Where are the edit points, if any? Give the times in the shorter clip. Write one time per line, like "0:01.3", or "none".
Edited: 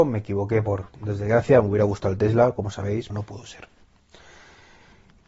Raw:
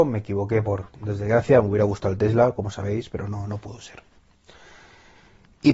0:03.1